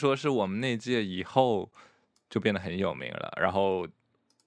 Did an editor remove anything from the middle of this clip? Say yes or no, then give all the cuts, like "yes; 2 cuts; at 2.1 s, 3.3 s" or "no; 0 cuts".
no; 0 cuts